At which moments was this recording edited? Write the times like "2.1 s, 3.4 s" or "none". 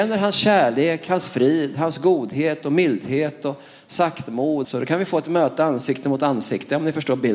4.6 s